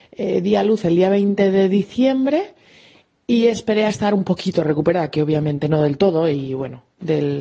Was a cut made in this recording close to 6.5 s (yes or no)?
no